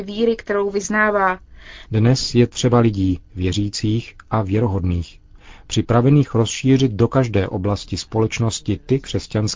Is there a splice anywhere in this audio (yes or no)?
yes